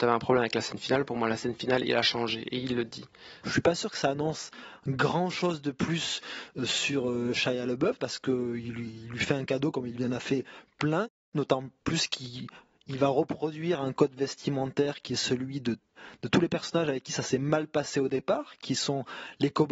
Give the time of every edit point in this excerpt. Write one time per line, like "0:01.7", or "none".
0:03.4